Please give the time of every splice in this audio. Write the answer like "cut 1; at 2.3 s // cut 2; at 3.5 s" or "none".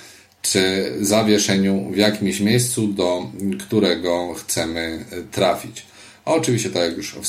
none